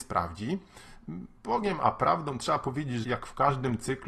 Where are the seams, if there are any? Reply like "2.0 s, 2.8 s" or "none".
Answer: 1.4 s, 3.0 s

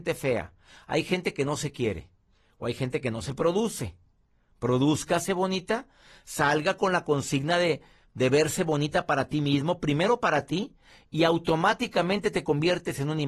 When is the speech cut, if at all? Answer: none

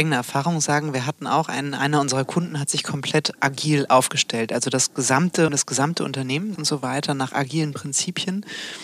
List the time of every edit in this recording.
5.5 s, 6.6 s

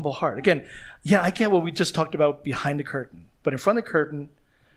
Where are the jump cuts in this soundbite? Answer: none

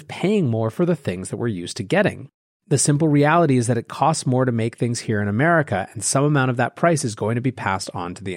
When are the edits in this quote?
none

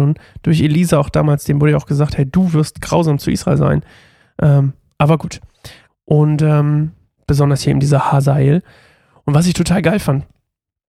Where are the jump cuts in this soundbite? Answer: 5.9 s, 7.2 s

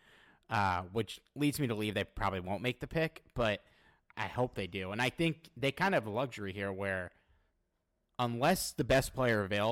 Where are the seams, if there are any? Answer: 4.1 s

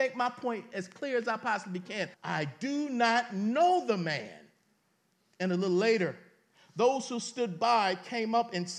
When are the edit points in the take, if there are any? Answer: 2.1 s

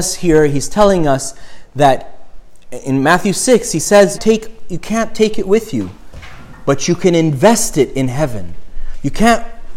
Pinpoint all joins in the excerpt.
4.2 s

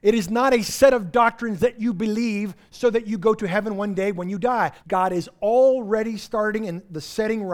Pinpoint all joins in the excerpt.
4.8 s

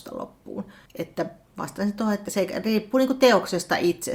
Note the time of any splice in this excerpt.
2.2 s

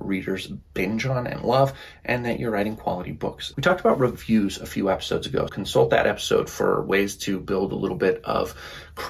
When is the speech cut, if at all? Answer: 3.5 s, 5.5 s

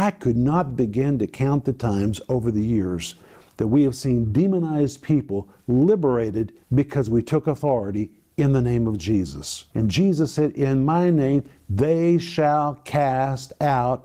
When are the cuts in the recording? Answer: 6.6 s, 9.7 s

